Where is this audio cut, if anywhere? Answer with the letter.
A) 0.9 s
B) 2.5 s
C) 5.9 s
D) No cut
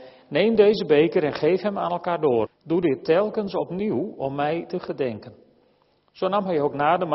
B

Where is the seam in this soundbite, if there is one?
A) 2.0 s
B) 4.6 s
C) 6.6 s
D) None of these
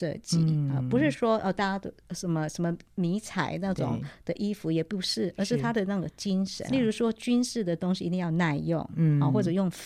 C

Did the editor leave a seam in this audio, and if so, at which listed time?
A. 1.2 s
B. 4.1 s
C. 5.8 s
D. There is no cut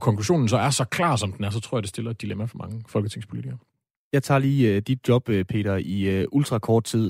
D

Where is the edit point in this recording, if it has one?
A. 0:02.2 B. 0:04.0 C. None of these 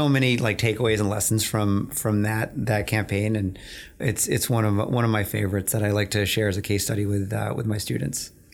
B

